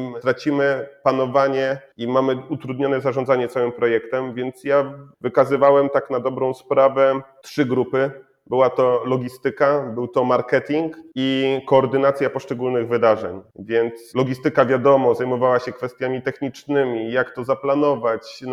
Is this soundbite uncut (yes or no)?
yes